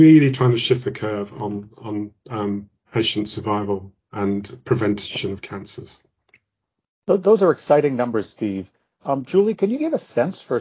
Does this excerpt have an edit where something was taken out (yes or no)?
no